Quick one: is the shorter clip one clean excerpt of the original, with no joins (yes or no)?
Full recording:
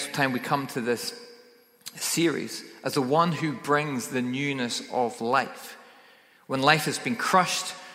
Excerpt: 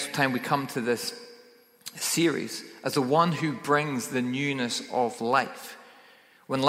yes